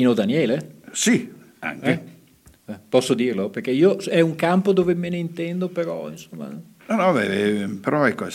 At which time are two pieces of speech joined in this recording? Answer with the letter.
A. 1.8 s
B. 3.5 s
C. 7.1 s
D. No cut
D